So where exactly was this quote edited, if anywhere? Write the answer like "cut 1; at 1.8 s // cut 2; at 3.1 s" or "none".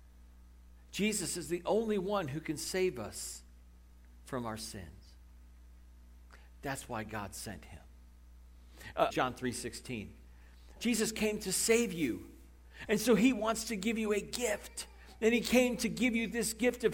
cut 1; at 9.1 s // cut 2; at 10.8 s // cut 3; at 12.9 s